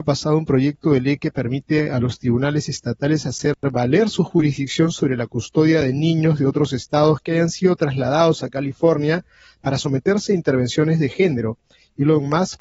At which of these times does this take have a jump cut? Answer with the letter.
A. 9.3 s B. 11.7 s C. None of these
C